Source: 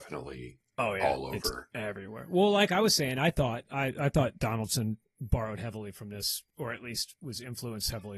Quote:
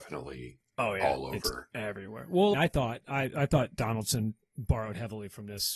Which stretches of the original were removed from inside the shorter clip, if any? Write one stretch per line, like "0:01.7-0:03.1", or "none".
0:02.5-0:03.2